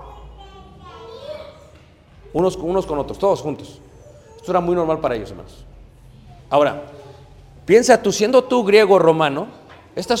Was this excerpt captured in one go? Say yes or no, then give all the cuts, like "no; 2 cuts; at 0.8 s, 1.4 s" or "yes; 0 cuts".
no; 1 cut; at 6.4 s